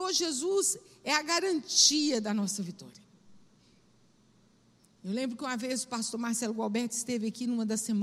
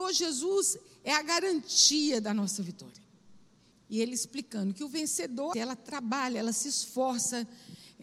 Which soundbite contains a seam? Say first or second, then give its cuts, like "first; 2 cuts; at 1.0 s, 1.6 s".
second; 2 cuts; at 3.7 s, 5.5 s